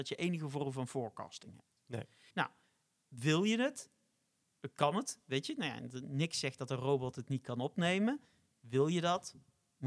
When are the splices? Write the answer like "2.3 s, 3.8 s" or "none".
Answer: 2.3 s